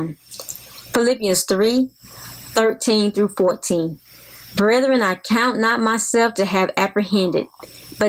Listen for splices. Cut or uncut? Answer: uncut